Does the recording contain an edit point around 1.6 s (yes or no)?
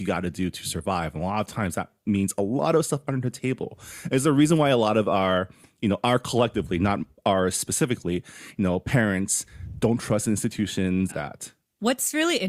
no